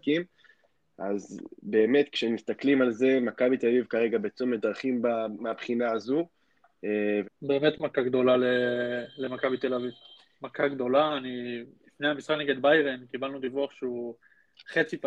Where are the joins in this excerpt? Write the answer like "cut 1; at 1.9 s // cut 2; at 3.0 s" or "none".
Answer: cut 1; at 7.2 s